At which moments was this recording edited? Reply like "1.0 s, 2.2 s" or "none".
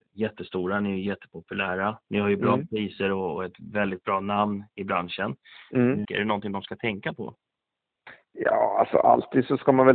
6.0 s